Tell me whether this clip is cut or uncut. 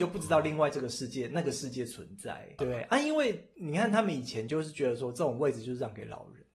cut